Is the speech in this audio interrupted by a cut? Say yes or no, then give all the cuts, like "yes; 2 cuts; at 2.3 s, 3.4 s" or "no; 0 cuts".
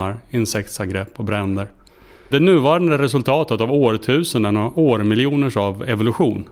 yes; 1 cut; at 2.3 s